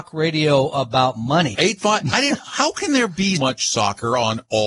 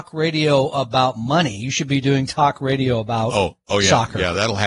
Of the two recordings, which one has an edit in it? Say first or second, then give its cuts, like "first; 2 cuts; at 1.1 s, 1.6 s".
first; 2 cuts; at 1.5 s, 3.4 s